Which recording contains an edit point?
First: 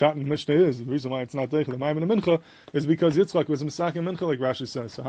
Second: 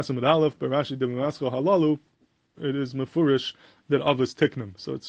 second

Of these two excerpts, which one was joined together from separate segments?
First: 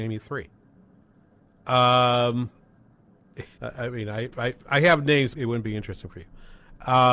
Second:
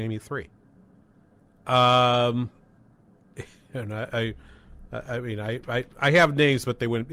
first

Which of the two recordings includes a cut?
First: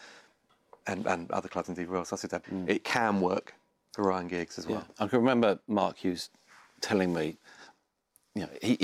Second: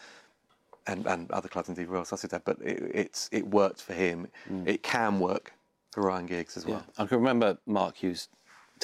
first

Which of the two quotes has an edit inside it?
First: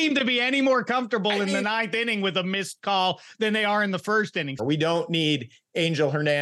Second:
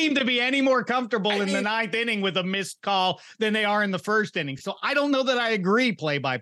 first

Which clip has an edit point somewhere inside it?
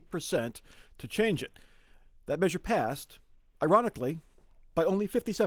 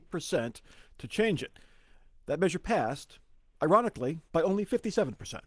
second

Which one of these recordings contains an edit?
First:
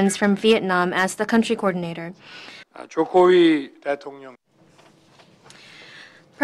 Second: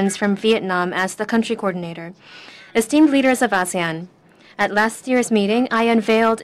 first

